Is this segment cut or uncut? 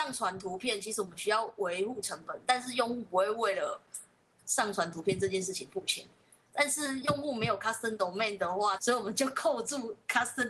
cut